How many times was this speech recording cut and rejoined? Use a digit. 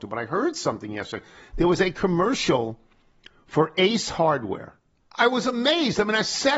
1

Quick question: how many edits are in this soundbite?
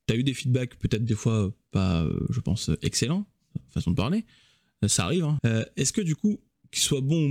1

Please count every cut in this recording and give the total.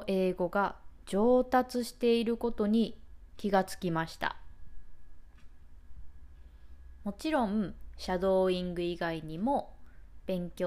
0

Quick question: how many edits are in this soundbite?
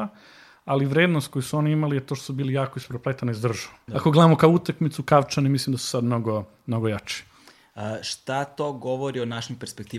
1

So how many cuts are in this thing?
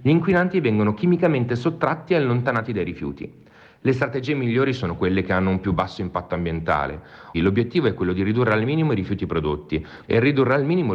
2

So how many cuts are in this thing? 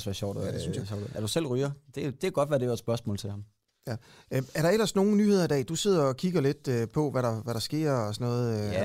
0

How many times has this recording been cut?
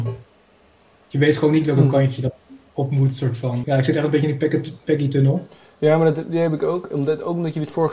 1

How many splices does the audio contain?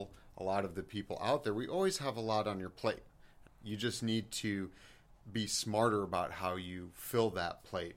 1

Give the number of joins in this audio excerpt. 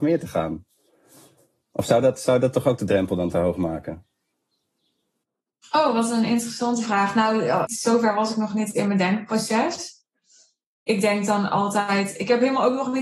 1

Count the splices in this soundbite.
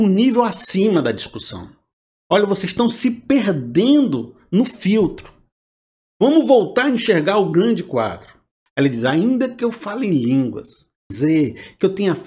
2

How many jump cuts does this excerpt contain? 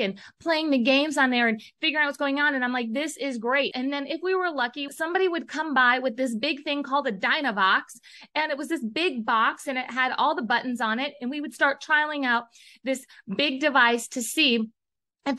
2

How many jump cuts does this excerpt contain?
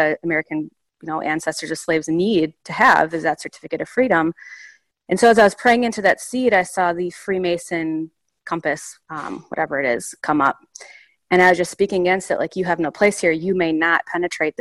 1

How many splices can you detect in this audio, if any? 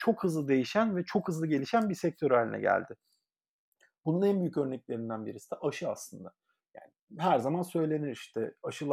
0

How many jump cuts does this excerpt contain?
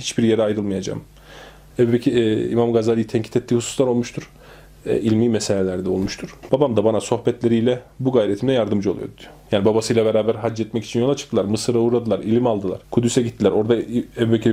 3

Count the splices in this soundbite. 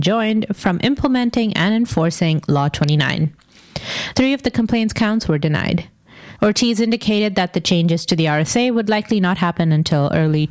2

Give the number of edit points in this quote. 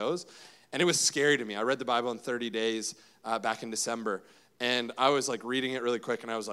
0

